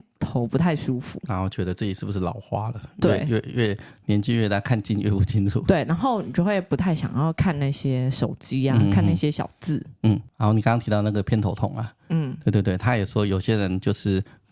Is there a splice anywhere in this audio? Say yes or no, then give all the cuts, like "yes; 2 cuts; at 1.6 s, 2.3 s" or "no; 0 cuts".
no; 0 cuts